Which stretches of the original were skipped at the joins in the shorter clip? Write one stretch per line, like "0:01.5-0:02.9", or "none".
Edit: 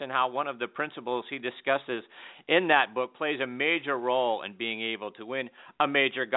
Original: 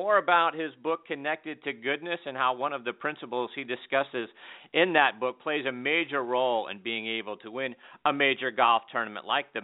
none